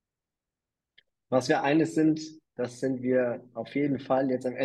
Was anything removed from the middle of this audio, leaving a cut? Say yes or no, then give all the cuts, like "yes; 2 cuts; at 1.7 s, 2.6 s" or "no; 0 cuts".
no; 0 cuts